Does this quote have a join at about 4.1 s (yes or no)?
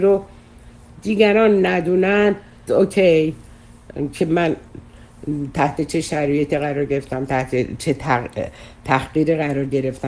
no